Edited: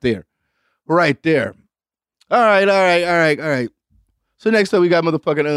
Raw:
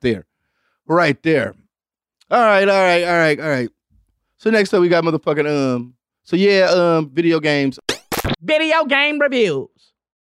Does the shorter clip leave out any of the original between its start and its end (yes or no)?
no